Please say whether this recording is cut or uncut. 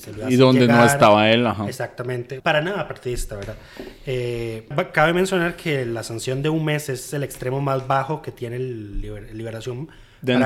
cut